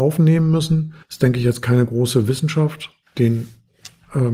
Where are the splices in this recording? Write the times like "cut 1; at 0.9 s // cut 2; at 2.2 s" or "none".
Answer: cut 1; at 1.0 s // cut 2; at 3.0 s